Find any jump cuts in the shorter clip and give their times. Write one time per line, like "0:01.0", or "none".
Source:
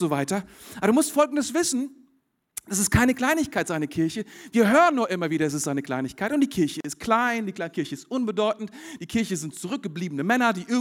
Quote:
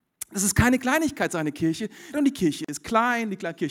0:02.1